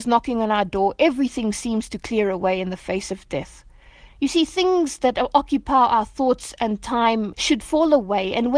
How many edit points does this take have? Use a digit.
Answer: 2